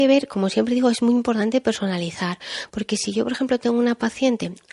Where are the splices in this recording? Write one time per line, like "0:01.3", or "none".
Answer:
none